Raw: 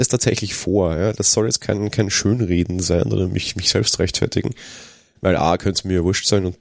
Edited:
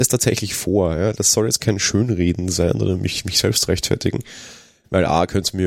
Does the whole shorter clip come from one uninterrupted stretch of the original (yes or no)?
no